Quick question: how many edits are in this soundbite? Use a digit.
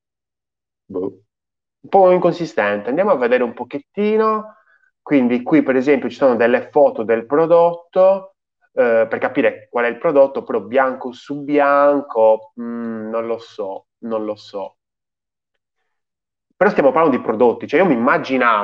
0